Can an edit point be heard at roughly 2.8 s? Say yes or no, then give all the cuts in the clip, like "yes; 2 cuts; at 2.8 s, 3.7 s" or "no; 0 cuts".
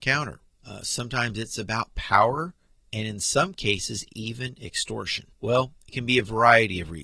no; 1 cut; at 5.3 s